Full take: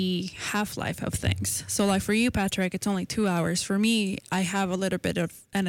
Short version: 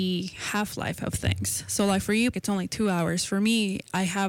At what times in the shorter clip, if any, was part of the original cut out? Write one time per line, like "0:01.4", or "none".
0:02.3